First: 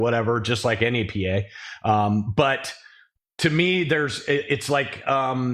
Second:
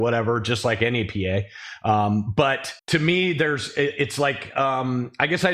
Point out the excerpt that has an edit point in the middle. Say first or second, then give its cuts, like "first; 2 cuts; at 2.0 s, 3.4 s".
second; 1 cut; at 2.8 s